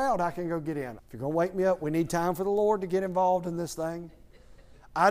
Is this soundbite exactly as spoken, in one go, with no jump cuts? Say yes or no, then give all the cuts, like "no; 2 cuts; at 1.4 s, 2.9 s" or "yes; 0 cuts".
no; 1 cut; at 1.0 s